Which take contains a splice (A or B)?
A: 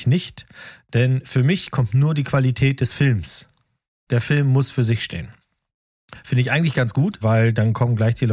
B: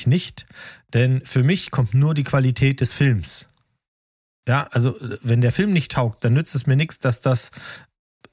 A